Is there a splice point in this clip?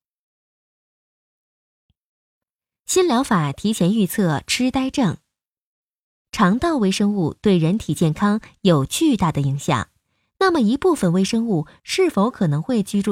yes; 1 cut; at 6.2 s

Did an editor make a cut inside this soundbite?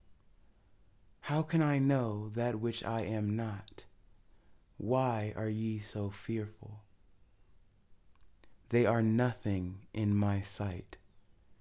yes; 1 cut; at 8.5 s

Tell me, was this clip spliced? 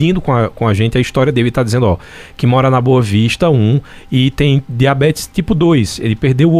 no; 0 cuts

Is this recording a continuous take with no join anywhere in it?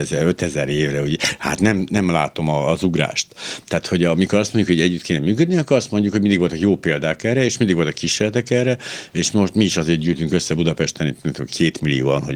yes; 0 cuts

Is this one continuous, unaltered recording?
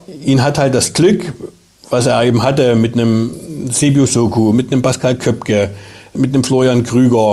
no; 1 cut; at 6.2 s

